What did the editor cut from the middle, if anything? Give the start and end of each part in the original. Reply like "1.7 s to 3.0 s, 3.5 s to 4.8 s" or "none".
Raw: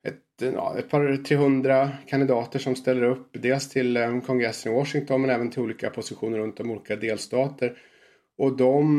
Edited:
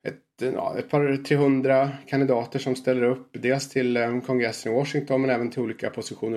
none